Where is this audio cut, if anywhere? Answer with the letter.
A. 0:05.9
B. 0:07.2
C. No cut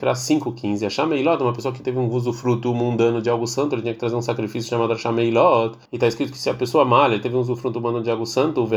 A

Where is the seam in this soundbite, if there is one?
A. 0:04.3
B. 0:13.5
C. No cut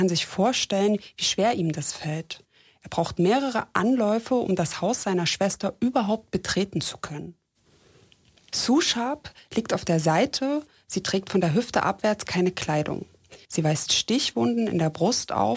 B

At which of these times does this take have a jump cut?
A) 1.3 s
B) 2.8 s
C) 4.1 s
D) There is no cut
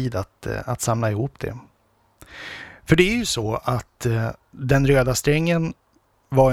D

